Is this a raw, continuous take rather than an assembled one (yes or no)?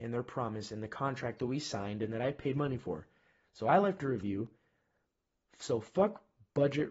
yes